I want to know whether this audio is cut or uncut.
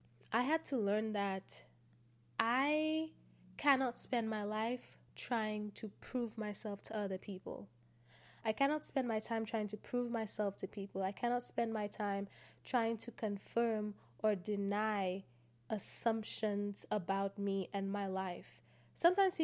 cut